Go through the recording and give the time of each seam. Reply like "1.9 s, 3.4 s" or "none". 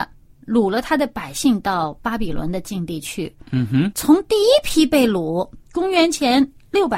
3.9 s, 5.7 s